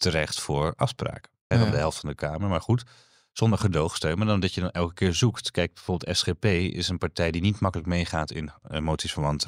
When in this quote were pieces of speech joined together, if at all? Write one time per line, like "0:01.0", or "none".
0:01.5